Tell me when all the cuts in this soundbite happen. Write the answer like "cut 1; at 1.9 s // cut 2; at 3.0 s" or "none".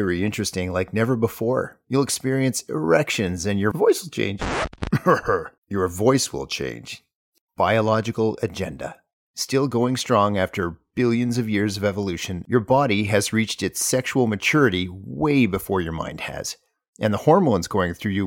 cut 1; at 7.5 s // cut 2; at 16.9 s

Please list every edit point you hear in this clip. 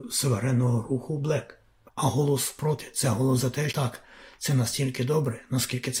cut 1; at 1.9 s // cut 2; at 3.7 s

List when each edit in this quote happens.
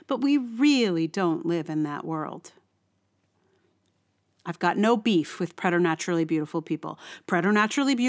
none

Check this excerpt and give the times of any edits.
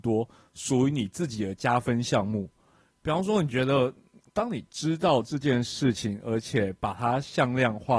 cut 1; at 4.3 s

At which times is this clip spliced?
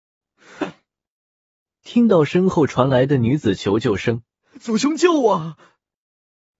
cut 1; at 4.4 s

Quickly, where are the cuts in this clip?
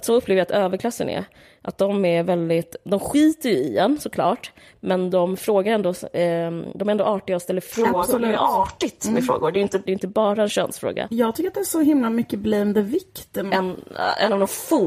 cut 1; at 9.9 s // cut 2; at 11.1 s // cut 3; at 13.5 s

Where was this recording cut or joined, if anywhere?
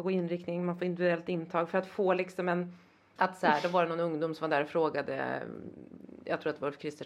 cut 1; at 3.2 s

